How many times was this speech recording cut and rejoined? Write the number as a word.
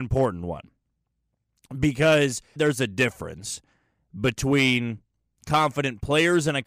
one